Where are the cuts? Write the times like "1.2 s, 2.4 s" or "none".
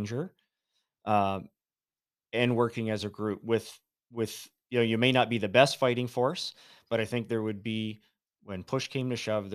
none